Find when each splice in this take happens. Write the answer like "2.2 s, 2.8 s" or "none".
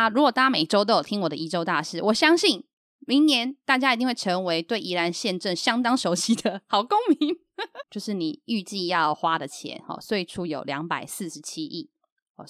7.8 s